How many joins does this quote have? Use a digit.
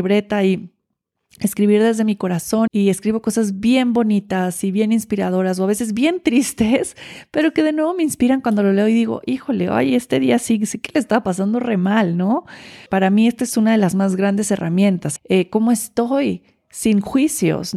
3